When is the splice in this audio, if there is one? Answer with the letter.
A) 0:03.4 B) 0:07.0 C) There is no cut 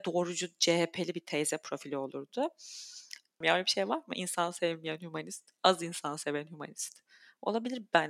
A